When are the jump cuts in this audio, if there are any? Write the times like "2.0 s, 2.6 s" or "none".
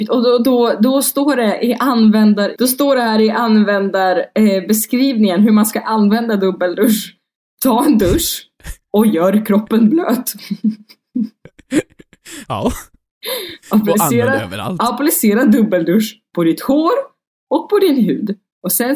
2.5 s

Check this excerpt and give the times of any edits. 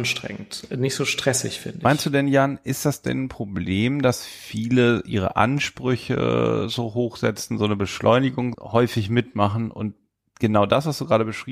8.5 s

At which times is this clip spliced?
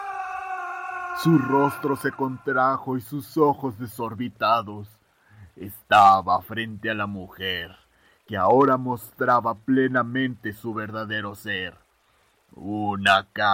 none

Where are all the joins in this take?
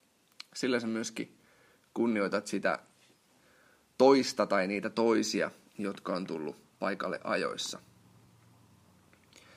none

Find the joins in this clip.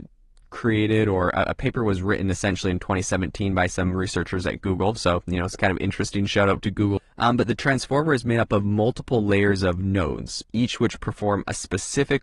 7.0 s

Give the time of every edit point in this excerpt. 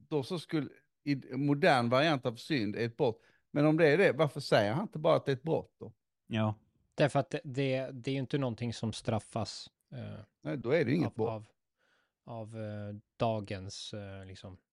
none

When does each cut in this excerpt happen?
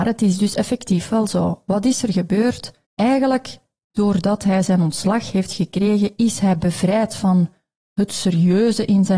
2.8 s

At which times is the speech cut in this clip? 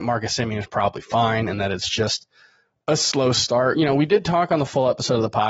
none

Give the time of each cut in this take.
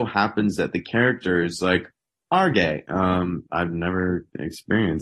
2.9 s

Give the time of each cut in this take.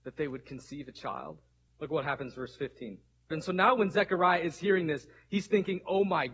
1.7 s, 3.3 s

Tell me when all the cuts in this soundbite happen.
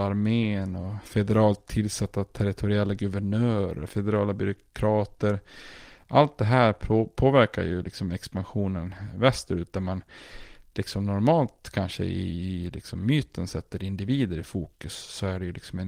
3.9 s

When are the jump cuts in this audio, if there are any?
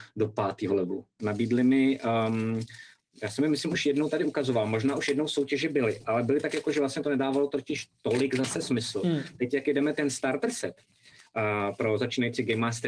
1.2 s

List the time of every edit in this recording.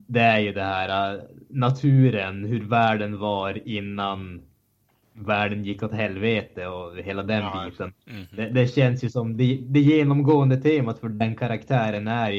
none

